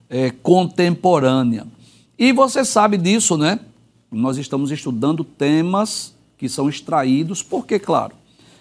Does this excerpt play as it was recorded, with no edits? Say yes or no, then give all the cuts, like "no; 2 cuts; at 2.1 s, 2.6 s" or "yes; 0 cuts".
no; 1 cut; at 4.1 s